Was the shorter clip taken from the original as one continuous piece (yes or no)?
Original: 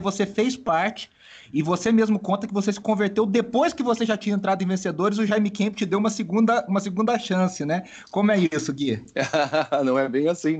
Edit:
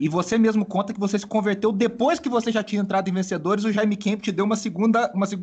yes